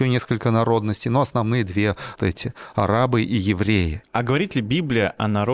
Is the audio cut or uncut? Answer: cut